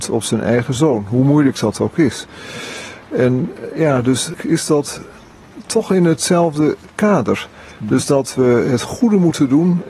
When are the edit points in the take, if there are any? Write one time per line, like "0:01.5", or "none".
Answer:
none